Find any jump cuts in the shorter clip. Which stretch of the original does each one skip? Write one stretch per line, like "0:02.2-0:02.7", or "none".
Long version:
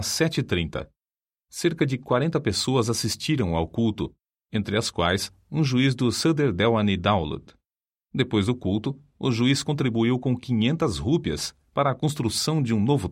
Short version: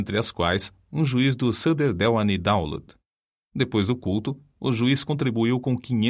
none